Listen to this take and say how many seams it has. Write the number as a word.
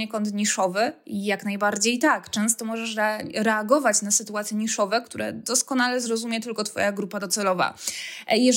zero